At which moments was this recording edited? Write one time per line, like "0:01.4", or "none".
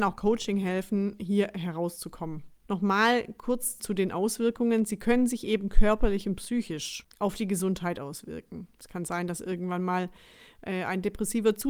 0:02.6